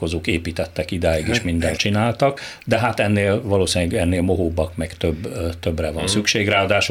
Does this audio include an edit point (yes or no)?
yes